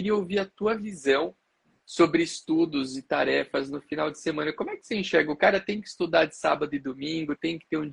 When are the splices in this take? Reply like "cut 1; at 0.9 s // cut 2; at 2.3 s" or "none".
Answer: none